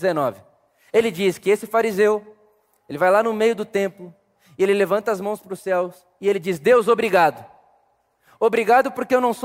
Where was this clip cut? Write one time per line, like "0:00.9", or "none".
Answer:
none